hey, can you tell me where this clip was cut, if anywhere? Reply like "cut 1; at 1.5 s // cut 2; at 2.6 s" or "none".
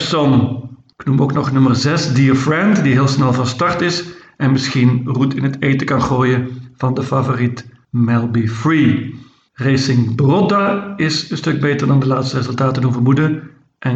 none